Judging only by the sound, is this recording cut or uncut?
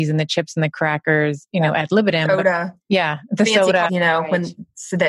cut